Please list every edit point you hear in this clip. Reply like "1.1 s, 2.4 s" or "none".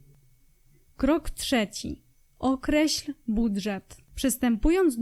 4.1 s